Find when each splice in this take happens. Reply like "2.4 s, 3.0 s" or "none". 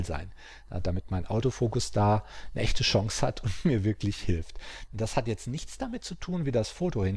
4.9 s